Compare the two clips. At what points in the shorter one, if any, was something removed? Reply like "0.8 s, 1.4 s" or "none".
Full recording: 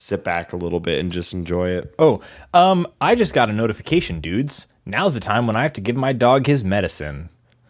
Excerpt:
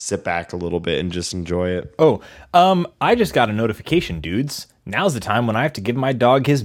none